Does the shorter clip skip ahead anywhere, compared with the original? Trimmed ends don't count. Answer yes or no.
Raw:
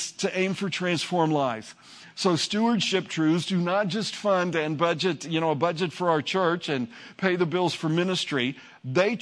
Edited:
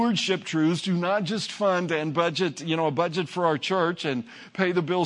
no